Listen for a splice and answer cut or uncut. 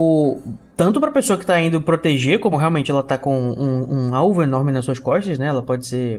uncut